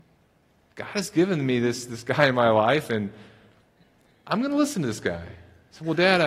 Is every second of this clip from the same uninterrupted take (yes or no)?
yes